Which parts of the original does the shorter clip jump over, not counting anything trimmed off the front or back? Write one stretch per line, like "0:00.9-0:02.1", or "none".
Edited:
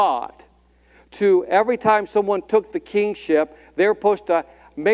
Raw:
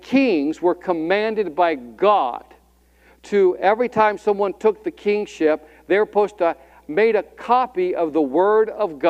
none